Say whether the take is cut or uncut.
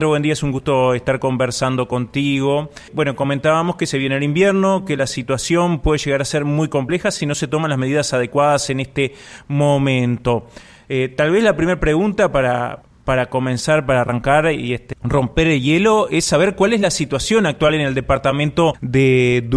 uncut